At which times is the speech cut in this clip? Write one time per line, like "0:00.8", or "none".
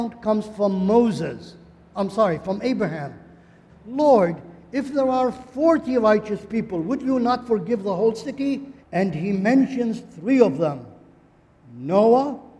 0:03.7
0:08.8

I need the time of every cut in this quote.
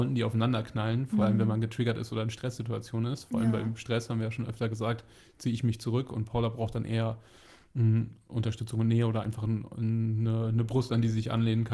none

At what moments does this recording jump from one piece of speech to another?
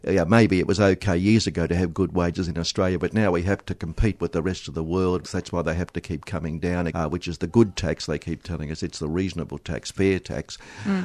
0:05.2
0:06.9

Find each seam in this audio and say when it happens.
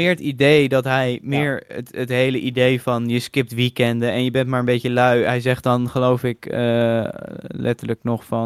none

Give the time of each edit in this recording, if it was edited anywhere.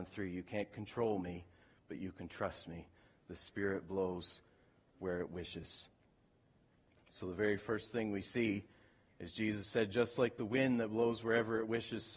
none

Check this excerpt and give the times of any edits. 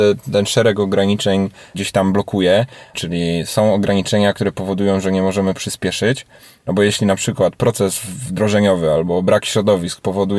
0:02.9
0:06.6

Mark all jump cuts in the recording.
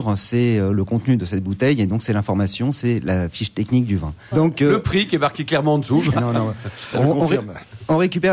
0:04.3
0:06.1

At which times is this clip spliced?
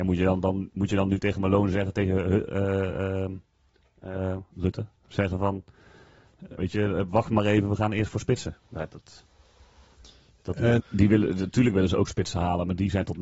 0:05.0
0:06.6
0:10.8

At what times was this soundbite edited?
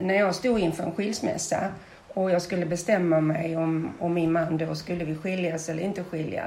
none

